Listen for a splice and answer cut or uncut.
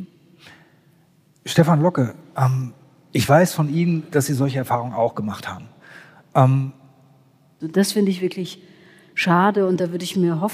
cut